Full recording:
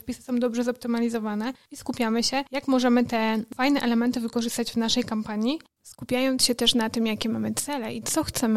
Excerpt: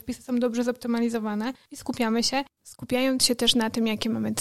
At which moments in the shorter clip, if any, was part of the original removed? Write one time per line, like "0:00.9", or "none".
0:02.5